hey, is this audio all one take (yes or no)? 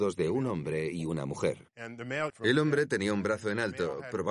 no